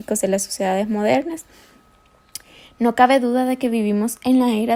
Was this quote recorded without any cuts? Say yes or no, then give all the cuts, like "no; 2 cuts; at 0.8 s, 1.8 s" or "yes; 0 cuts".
yes; 0 cuts